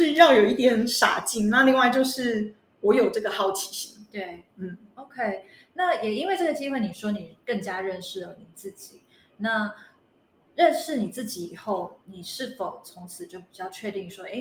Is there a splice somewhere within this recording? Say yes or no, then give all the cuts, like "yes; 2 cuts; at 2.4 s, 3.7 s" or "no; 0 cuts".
no; 0 cuts